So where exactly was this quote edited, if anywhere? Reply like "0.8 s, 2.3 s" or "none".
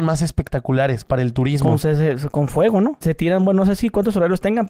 3.0 s